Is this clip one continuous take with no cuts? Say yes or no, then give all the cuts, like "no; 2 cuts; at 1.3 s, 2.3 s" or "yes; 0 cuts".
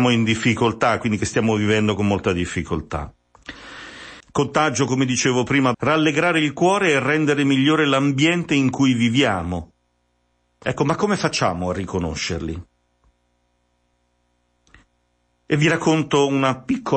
no; 2 cuts; at 4.2 s, 5.7 s